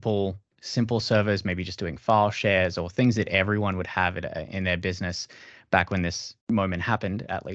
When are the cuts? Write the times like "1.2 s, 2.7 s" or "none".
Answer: 6.4 s